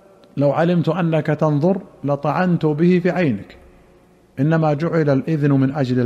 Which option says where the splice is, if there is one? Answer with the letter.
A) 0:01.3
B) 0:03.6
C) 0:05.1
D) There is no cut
D